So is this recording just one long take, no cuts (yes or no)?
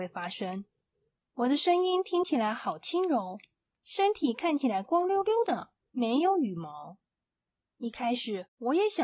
no